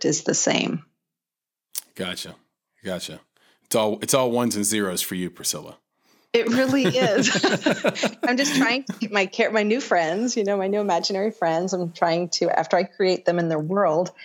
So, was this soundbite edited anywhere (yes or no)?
no